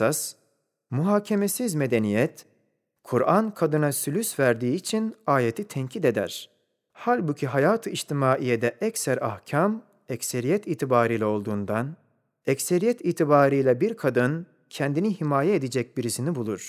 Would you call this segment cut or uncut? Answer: uncut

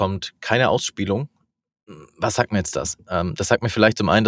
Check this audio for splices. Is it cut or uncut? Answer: uncut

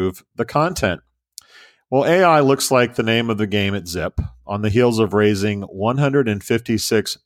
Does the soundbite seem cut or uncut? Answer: uncut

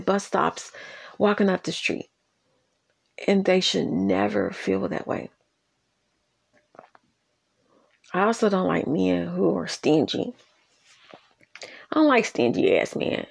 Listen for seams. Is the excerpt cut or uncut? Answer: uncut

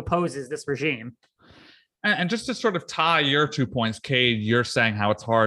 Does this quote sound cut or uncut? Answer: uncut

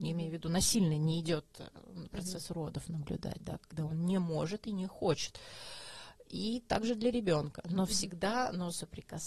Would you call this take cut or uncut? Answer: uncut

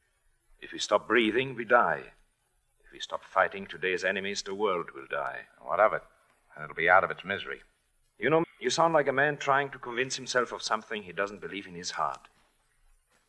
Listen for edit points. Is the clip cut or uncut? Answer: cut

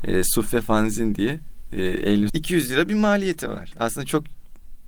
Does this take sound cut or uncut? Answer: cut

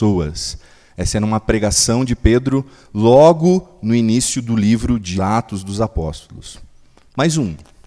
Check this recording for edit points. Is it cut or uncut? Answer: cut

